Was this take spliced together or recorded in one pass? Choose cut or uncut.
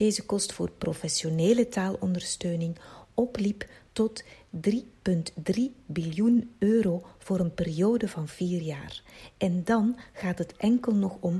uncut